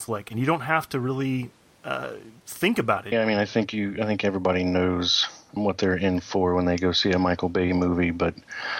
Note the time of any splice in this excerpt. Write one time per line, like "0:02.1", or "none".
0:03.1
0:05.6

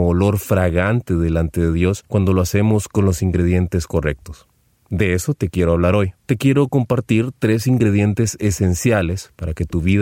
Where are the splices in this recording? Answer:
none

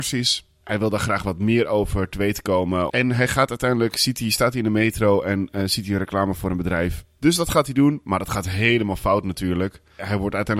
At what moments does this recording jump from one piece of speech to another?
0:02.9
0:07.1

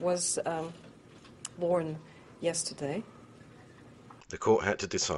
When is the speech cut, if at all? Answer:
0:01.6
0:04.2

